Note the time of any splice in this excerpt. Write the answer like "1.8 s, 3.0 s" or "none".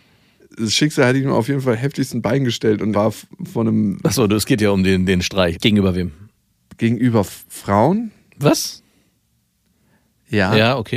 2.9 s, 5.5 s